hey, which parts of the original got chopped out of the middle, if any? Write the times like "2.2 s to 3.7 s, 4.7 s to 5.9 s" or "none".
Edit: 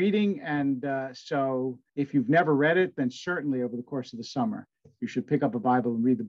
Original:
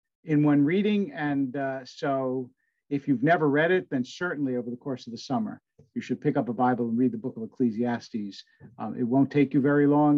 2.6 s to 2.8 s